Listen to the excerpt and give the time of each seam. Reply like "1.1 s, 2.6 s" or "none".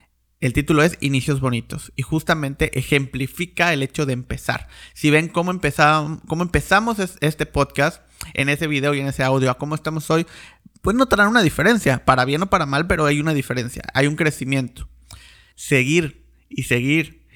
15.5 s

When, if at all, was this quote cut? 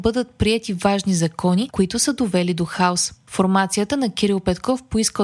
1.7 s

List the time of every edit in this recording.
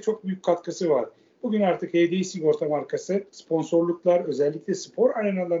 1.3 s, 3.3 s

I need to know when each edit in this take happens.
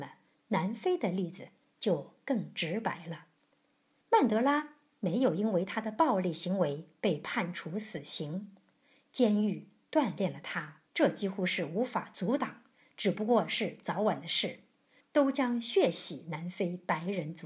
10.9 s

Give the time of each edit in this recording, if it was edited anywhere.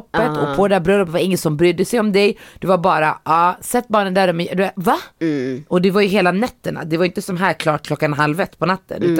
none

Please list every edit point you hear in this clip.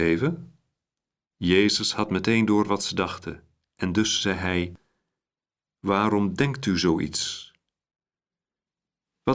none

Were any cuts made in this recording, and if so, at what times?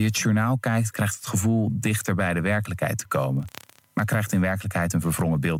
none

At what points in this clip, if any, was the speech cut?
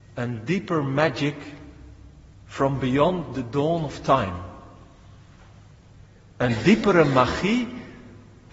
none

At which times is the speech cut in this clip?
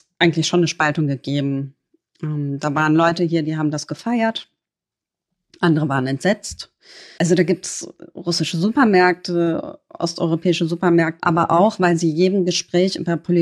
7.2 s, 11.2 s

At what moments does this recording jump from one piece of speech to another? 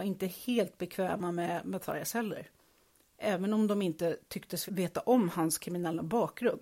4.7 s

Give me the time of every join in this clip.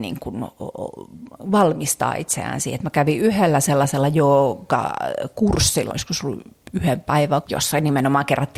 5.9 s, 7.4 s

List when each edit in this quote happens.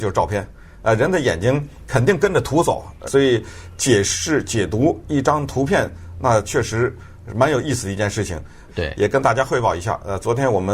3.1 s, 8.7 s

